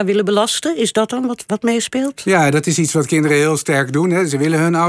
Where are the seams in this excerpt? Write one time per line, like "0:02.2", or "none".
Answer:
none